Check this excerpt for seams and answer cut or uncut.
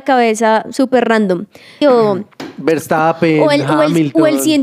cut